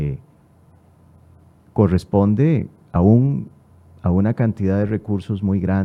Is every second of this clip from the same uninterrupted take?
yes; 0 cuts

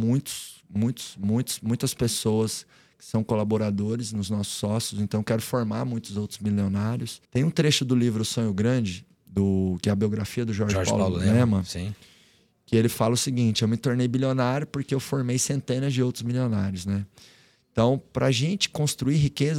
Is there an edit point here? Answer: yes; 1 cut; at 7.2 s

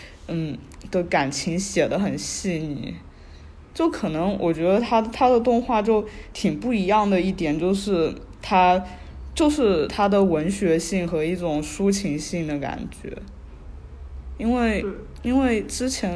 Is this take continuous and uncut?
yes; 0 cuts

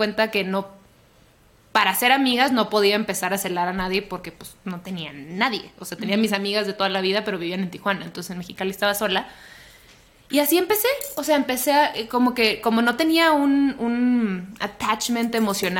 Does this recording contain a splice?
no; 0 cuts

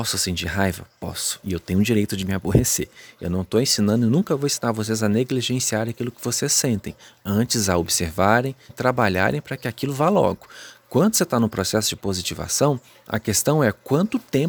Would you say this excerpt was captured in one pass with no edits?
no; 1 cut; at 8.7 s

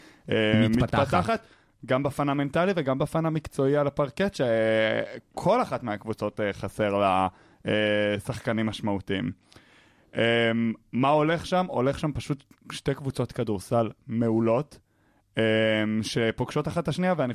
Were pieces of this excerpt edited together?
no; 0 cuts

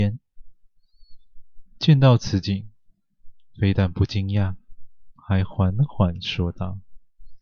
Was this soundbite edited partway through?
no; 0 cuts

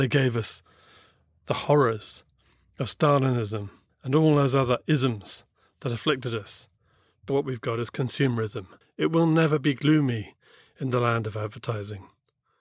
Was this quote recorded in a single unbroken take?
no; 3 cuts; at 3.9 s, 7.3 s, 8.8 s

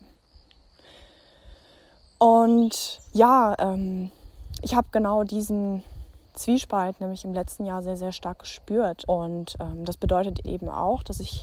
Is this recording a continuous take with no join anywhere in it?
no; 2 cuts; at 9.1 s, 10.4 s

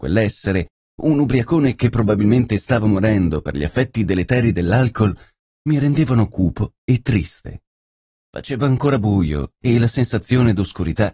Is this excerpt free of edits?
no; 1 cut; at 8.3 s

